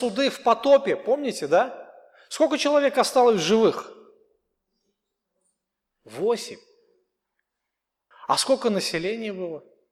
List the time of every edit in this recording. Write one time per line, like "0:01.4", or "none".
0:08.1